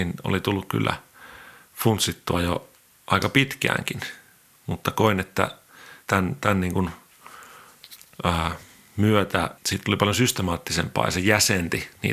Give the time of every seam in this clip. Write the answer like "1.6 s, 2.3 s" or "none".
6.0 s, 9.6 s